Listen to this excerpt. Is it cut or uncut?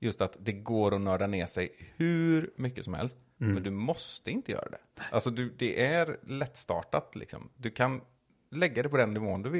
uncut